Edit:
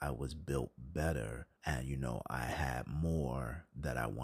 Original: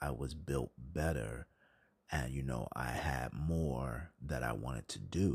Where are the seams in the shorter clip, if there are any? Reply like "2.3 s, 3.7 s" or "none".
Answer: 1.6 s

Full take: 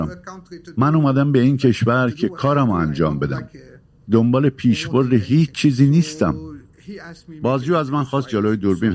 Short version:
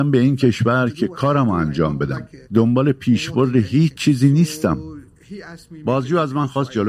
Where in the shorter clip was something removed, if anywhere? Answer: 2.4 s

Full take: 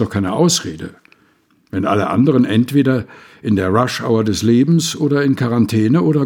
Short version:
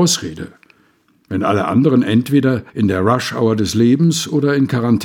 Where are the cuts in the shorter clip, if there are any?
2.7 s

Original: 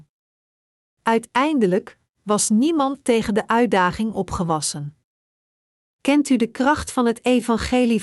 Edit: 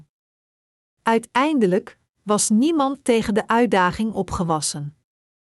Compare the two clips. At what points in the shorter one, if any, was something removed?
none

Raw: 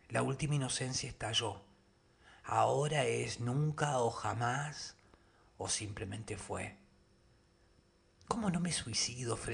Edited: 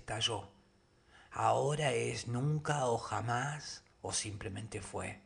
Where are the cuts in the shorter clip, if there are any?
3.9 s

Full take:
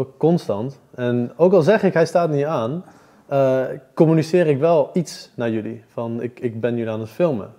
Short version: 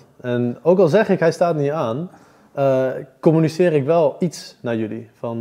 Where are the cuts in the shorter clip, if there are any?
none

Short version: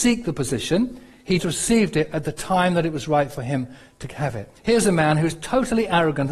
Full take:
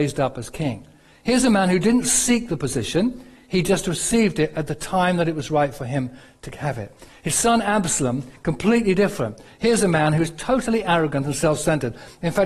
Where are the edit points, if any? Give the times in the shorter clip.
1.4 s, 4.6 s

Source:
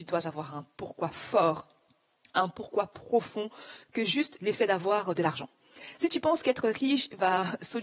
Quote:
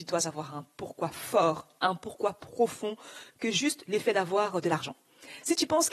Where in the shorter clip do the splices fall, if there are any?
1.8 s

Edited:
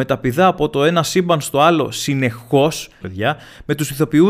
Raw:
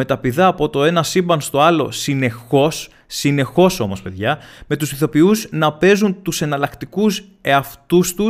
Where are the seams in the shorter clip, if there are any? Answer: 3.0 s

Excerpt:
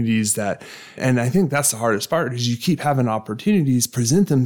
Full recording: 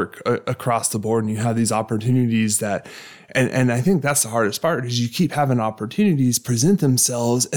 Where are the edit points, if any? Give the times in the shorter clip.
1.0 s

